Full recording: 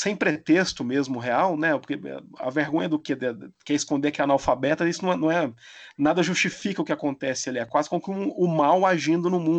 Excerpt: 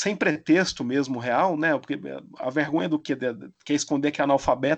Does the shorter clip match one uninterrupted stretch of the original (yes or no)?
yes